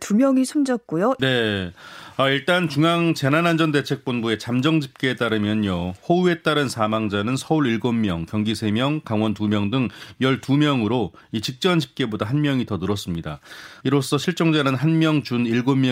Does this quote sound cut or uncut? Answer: cut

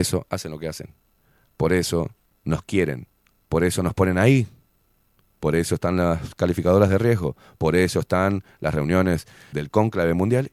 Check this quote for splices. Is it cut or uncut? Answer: cut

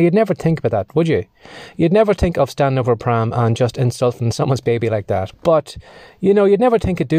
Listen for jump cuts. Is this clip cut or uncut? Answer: cut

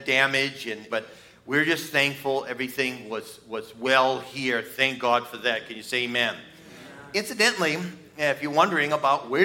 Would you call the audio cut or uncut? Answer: cut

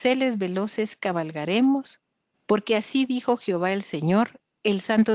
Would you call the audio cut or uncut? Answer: cut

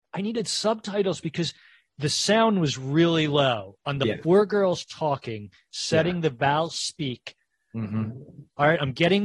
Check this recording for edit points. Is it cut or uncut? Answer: uncut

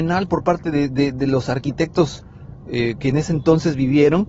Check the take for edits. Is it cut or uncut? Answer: uncut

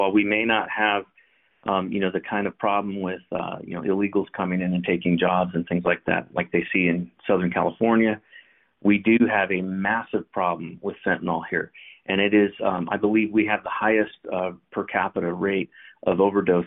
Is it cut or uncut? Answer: uncut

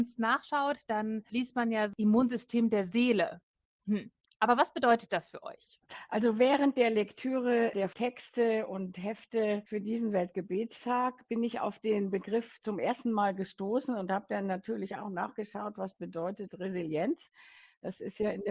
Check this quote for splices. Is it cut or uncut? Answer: uncut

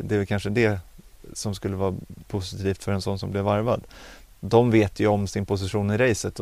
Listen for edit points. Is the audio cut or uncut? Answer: cut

